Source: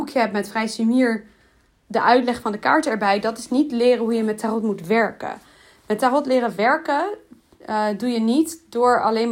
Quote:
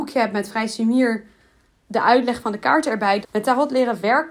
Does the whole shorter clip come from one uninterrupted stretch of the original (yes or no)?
no